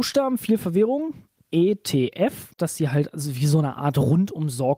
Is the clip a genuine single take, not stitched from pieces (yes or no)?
no